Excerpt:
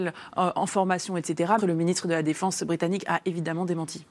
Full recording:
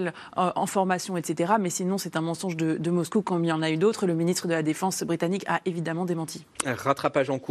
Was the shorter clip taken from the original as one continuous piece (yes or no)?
no